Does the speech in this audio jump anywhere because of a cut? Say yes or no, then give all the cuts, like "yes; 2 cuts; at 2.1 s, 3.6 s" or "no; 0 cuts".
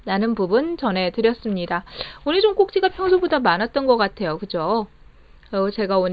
no; 0 cuts